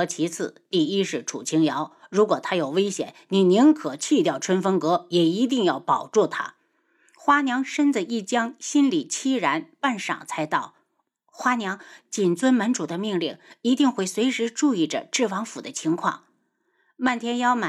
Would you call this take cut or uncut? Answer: uncut